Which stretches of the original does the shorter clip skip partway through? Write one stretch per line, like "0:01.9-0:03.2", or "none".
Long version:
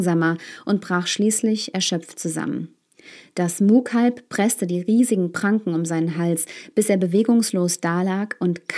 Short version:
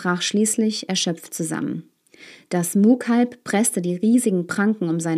none